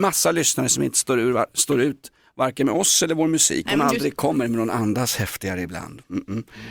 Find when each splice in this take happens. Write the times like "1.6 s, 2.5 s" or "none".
3.7 s